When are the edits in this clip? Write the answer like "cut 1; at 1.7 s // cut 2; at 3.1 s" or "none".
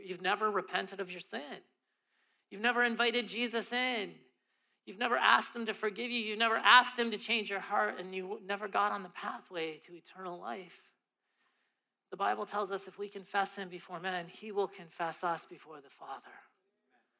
none